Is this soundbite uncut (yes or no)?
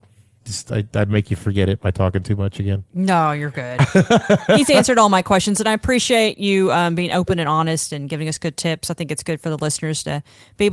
yes